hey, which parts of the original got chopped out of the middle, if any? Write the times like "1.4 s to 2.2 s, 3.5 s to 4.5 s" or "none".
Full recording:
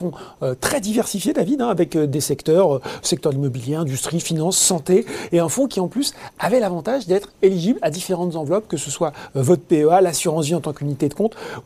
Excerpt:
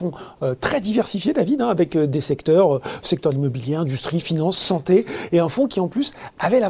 none